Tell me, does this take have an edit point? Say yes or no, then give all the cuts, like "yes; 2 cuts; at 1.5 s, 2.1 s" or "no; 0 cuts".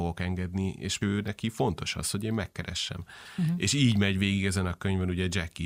no; 0 cuts